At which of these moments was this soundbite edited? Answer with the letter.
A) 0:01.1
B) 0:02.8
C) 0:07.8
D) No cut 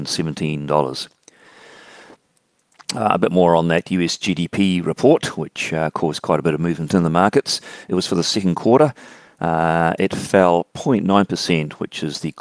D